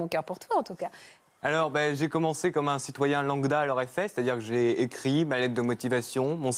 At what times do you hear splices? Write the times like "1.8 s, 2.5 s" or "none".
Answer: none